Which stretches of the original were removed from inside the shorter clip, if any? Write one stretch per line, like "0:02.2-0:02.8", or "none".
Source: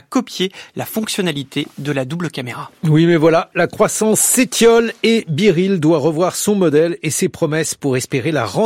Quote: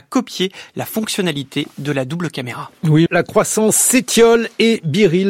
0:03.1-0:03.5

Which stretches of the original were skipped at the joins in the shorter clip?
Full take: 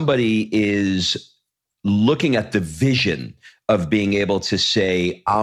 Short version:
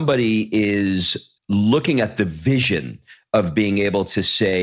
0:01.4-0:01.7

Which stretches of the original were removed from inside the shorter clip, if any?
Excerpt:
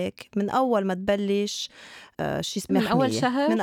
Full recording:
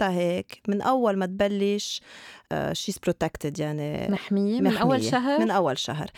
0:03.0-0:04.6

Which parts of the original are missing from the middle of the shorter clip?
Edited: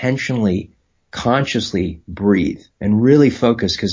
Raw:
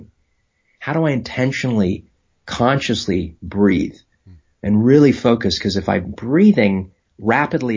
0:04.0-0:04.5

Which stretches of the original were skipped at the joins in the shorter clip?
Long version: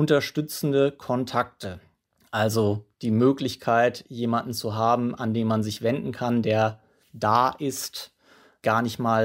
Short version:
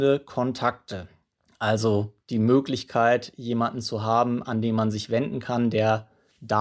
none

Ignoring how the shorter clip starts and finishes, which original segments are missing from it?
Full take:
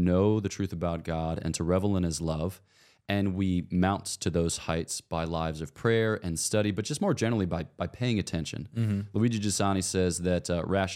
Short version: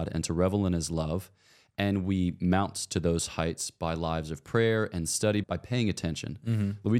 0:06.7-0:07.7

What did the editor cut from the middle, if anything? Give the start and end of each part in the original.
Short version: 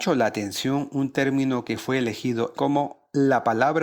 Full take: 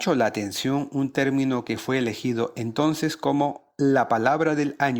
0:02.5-0:03.2

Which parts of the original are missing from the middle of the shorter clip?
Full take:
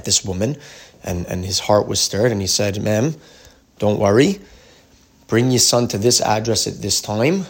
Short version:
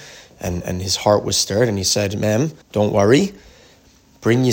0:03.2-0:03.7

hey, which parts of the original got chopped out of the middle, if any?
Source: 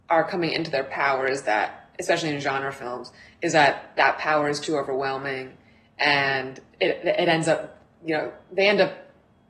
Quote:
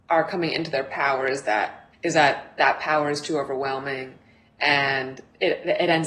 0:01.9-0:03.3

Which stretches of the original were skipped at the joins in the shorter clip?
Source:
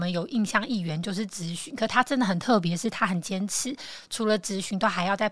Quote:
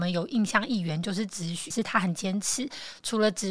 0:01.7-0:02.8

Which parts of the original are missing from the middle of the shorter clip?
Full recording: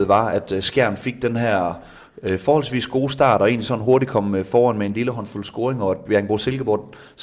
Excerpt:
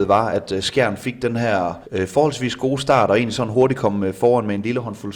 0:01.8-0:02.1

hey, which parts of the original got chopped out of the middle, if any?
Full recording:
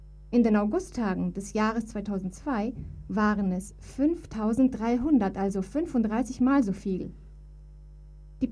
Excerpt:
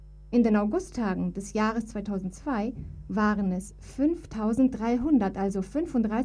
none

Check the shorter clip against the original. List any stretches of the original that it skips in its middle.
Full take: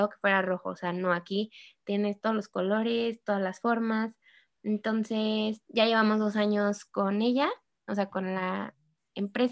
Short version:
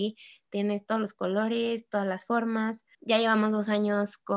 0:04.3-0:05.6

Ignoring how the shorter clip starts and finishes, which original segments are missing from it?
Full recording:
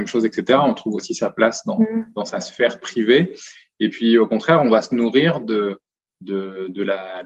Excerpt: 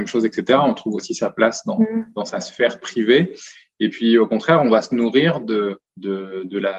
0:05.9-0:06.1

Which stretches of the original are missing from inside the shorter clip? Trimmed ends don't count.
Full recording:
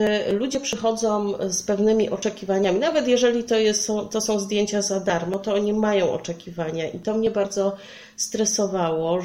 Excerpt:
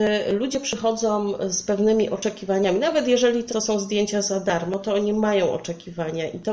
0:03.5-0:04.1

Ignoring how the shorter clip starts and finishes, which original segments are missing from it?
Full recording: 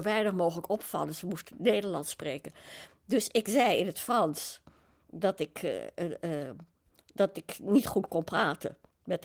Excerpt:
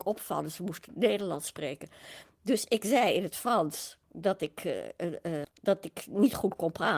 0:04.7-0:05.0
0:06.4-0:07.0

